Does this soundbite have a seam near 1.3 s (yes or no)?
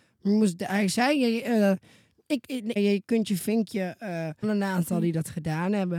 no